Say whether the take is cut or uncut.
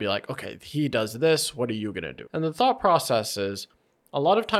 cut